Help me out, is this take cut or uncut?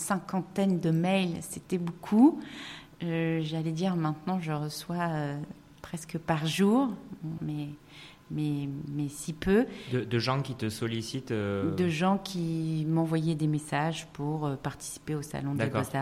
cut